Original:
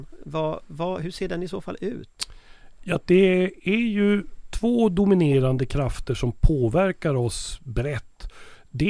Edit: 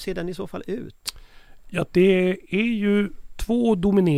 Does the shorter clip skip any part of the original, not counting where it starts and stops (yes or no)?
no